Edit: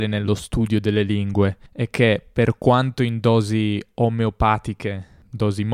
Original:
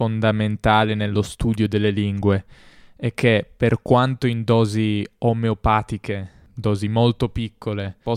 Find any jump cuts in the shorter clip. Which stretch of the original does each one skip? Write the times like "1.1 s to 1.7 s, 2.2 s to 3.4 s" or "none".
2.5 s to 2.9 s

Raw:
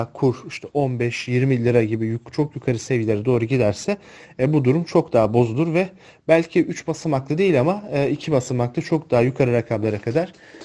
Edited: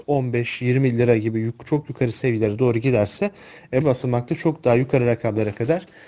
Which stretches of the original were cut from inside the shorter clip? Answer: 4.5 s to 8.3 s

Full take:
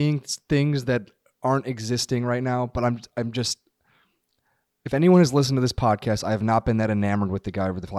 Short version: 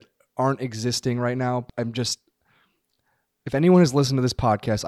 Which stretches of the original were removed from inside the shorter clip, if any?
2.7 s to 3.1 s

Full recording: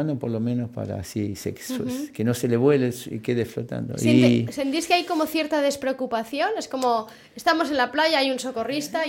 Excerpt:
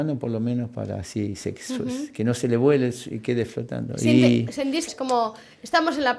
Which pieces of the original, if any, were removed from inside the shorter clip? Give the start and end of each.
4.9 s to 6.6 s

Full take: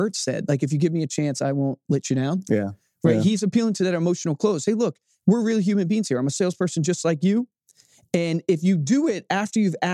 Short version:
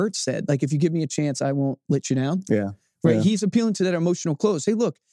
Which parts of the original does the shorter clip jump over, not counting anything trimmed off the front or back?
none

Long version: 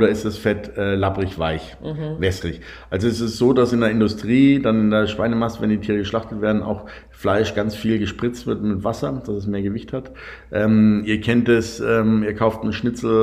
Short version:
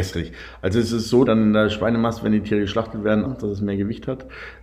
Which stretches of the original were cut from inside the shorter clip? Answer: 3.5 s to 4.6 s, 6.6 s to 9.1 s

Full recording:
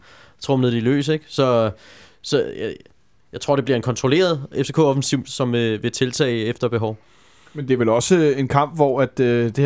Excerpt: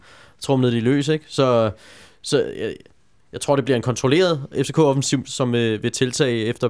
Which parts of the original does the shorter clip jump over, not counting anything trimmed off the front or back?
none

